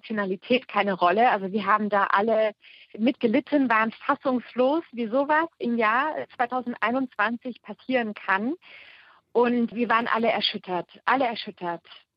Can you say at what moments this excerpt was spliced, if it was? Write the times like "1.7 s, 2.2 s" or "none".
none